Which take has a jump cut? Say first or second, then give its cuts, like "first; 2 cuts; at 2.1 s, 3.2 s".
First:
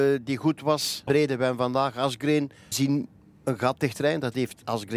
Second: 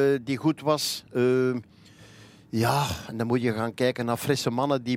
first; 2 cuts; at 1.1 s, 2.7 s